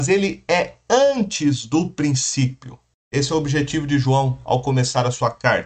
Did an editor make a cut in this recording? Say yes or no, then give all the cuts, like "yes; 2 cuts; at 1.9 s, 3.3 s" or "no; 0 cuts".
yes; 1 cut; at 2.9 s